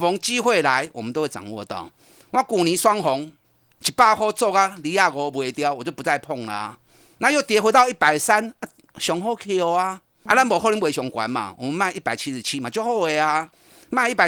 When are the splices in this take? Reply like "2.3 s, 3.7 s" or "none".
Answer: 10.3 s